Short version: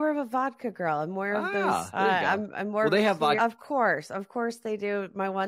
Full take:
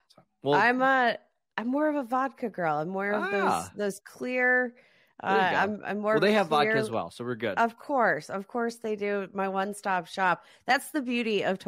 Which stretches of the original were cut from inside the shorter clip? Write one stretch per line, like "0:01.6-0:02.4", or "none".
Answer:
0:03.7-0:05.2
0:06.7-0:07.5